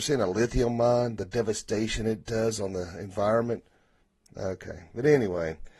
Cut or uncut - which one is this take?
uncut